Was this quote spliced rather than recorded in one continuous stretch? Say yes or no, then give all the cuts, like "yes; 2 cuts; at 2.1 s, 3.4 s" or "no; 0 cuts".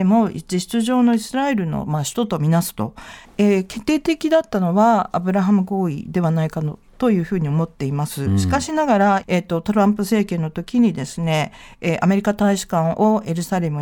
yes; 2 cuts; at 3.3 s, 9.2 s